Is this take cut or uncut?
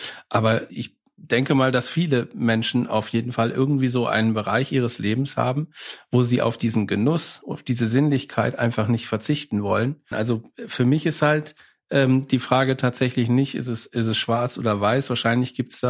cut